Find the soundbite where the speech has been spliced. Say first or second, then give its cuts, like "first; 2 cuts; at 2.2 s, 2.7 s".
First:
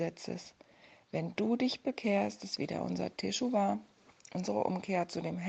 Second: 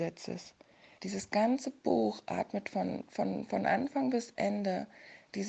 second; 1 cut; at 1.0 s